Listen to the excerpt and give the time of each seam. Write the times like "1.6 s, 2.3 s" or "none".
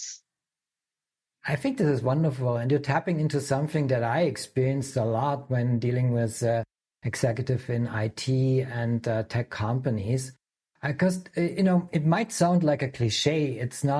none